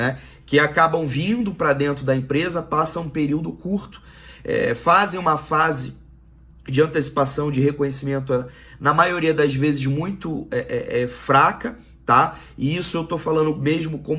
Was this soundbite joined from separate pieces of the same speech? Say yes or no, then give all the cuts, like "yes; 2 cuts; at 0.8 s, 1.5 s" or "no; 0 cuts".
no; 0 cuts